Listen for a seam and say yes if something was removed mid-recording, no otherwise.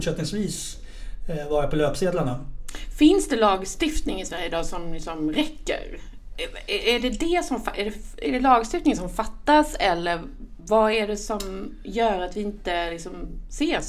no